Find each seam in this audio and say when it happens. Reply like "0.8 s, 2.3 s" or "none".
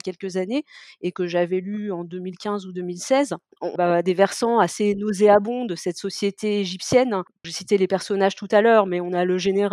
3.8 s, 7.4 s